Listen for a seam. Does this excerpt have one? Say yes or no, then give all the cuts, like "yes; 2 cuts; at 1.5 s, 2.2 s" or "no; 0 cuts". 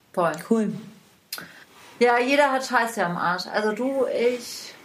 no; 0 cuts